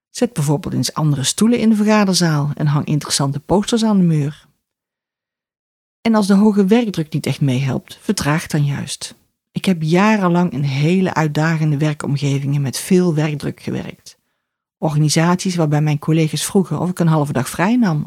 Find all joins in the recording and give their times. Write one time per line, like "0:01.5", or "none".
none